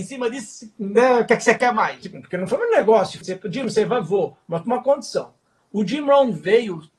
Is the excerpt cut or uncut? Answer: cut